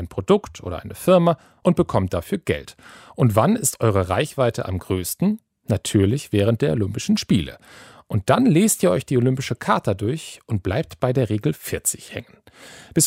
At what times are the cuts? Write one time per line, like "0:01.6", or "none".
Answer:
none